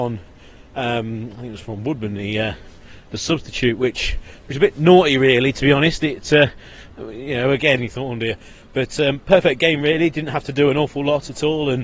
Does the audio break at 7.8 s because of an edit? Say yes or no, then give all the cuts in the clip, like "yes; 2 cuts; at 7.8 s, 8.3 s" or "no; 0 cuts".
yes; 1 cut; at 7.8 s